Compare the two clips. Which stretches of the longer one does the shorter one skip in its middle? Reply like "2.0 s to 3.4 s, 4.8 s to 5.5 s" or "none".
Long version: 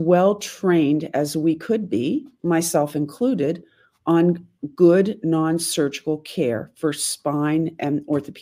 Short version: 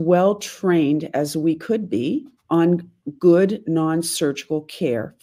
2.4 s to 3.9 s